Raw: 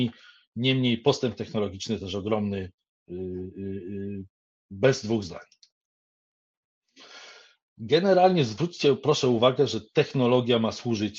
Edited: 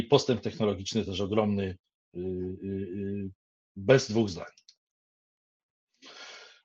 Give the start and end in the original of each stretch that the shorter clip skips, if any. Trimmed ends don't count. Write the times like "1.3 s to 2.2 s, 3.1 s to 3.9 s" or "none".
none